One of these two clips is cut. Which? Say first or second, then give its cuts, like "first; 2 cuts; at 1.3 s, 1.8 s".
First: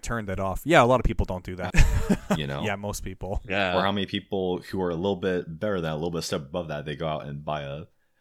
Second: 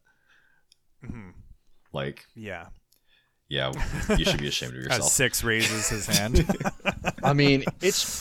first; 1 cut; at 1.7 s